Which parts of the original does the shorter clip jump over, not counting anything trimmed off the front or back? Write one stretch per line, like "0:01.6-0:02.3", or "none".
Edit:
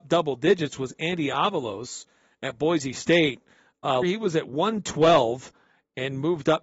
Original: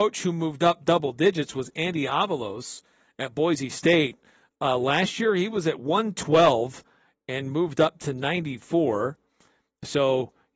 0:04.8-0:05.3